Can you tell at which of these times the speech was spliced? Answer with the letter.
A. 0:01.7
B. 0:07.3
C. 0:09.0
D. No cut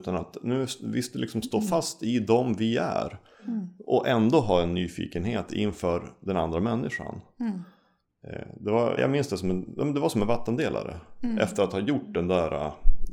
C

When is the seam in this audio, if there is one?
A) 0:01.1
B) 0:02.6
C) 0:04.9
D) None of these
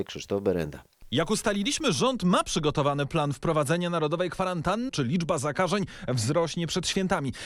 C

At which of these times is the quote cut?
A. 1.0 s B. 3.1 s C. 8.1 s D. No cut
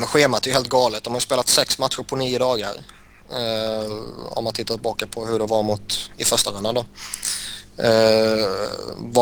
D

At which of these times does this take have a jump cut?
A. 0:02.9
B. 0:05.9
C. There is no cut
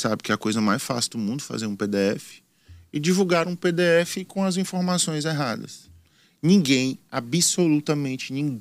C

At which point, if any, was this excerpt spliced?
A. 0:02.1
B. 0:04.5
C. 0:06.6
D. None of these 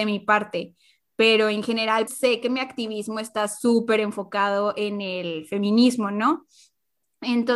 A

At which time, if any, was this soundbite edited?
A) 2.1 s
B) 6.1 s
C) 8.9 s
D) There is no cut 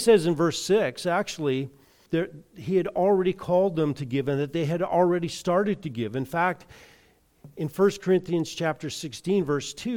A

